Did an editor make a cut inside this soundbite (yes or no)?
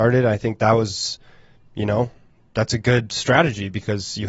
no